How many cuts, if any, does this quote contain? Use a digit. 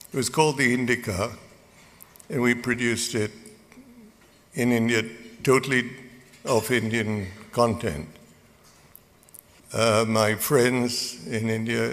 1